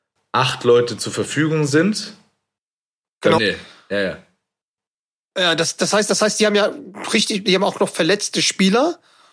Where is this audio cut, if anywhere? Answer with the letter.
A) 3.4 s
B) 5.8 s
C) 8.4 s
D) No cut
A